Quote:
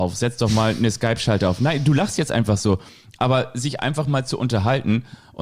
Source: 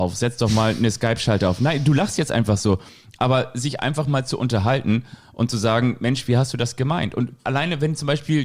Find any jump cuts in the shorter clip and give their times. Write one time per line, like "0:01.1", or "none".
none

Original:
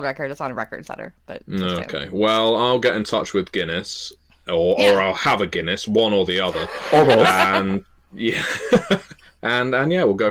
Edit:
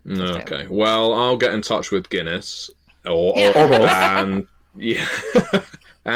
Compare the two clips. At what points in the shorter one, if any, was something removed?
0:03.5

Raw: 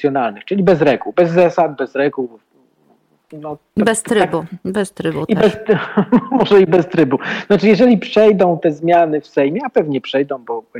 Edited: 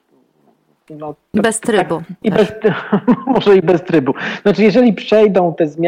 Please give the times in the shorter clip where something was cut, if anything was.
0:02.2

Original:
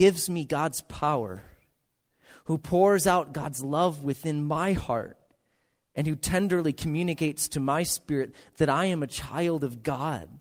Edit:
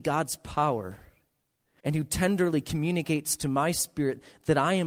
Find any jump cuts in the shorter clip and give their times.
0:01.8

